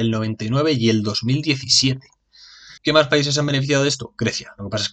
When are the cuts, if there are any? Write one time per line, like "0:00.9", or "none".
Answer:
0:02.8